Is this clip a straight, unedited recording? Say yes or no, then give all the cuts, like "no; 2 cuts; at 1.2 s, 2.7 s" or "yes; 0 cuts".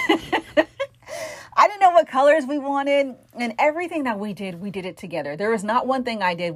yes; 0 cuts